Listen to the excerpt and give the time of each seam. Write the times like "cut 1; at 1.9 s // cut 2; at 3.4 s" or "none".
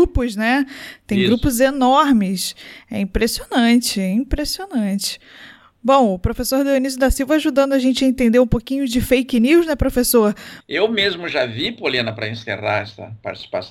cut 1; at 10.6 s